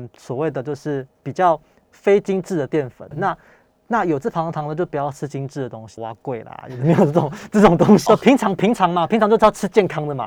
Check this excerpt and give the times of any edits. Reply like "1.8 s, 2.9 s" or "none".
3.1 s, 6.0 s, 8.1 s

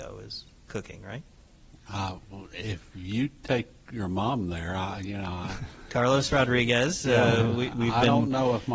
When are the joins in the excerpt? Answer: none

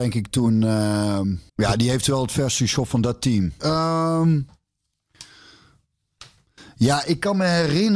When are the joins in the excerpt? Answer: 1.5 s, 3.6 s

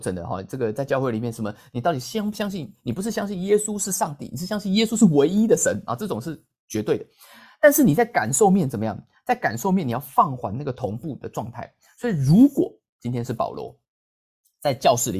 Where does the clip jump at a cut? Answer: none

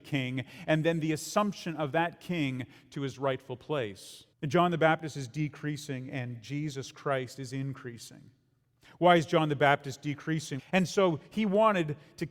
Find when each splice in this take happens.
4.3 s, 10.6 s

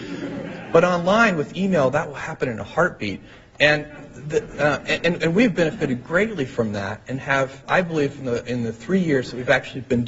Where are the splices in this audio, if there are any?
7.6 s

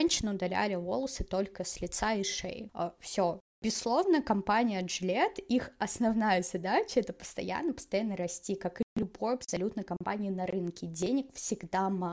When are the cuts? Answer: none

